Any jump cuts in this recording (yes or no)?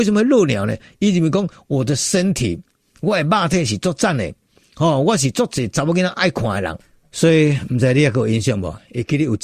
no